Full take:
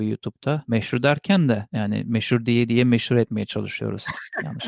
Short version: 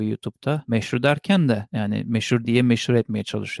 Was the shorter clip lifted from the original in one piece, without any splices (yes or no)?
no